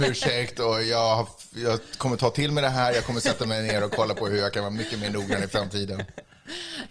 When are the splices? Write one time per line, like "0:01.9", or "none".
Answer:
none